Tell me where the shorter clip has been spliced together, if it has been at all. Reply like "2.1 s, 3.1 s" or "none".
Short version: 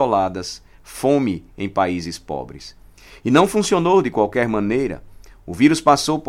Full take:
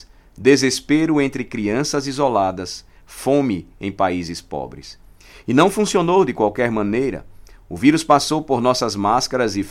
none